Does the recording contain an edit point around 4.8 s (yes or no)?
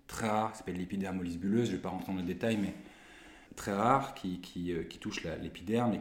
no